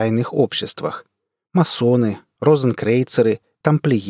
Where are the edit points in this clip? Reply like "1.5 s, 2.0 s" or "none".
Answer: none